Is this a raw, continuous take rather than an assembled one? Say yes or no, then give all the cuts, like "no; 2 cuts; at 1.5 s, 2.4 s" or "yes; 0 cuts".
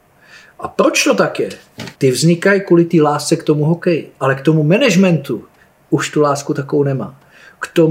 no; 1 cut; at 1.9 s